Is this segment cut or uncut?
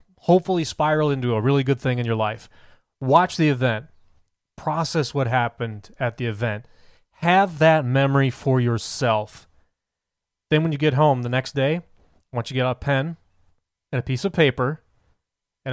uncut